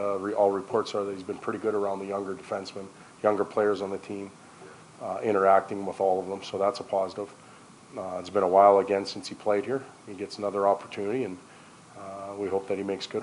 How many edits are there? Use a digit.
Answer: 0